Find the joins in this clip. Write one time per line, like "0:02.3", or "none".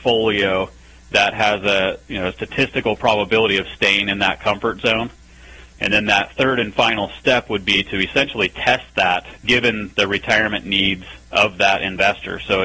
0:09.4
0:11.3